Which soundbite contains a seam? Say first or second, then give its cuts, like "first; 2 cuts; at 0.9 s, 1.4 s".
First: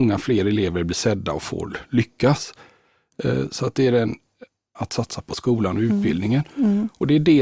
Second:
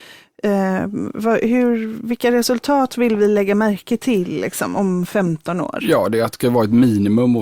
first; 1 cut; at 4.7 s